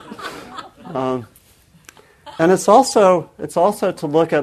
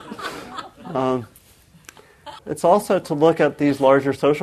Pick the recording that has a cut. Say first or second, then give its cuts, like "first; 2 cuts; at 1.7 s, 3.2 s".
second; 1 cut; at 2.4 s